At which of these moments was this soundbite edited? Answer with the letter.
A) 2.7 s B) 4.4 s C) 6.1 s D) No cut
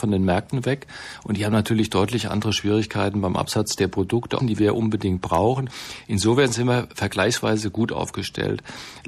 B